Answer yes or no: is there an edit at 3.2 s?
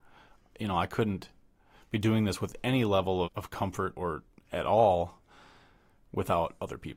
yes